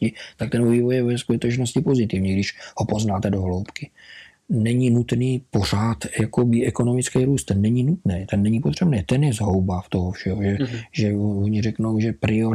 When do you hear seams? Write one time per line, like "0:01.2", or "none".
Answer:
0:04.3

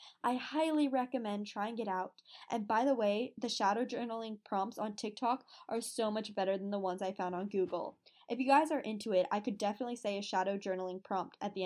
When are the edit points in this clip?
none

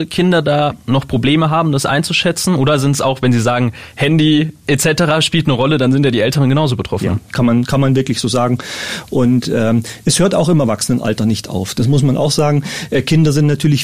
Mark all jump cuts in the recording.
none

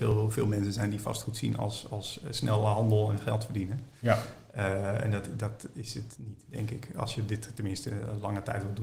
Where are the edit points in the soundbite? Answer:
none

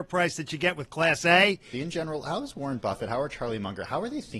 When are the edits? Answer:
0:01.7

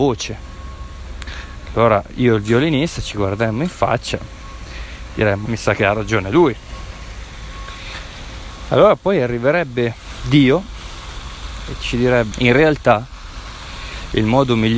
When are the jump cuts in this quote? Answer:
0:05.5
0:12.3

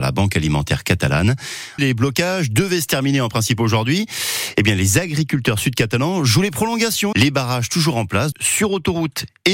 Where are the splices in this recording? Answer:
0:01.8
0:07.1
0:08.3

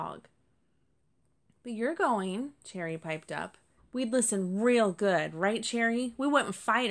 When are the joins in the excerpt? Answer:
0:03.8

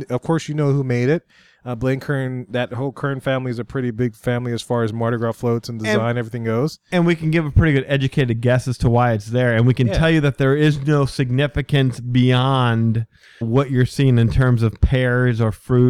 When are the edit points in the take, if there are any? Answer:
0:13.4

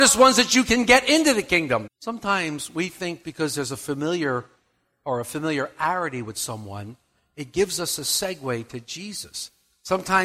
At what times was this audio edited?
0:01.9
0:03.2

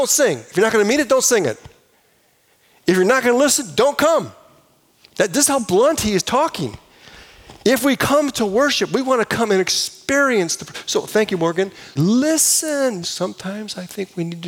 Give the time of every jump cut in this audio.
0:12.0
0:13.0

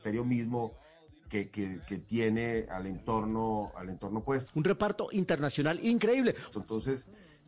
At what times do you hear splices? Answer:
0:04.5
0:06.5

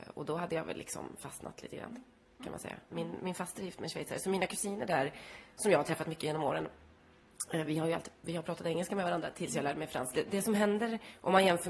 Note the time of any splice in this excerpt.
0:02.9
0:10.1

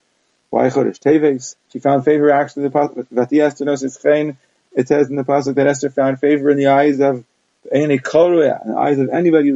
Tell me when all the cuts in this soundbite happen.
0:01.6

